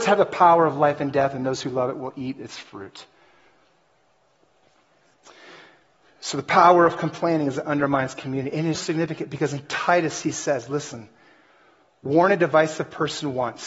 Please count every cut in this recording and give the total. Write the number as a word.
one